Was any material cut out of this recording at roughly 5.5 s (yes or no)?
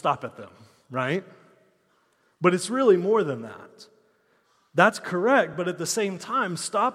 no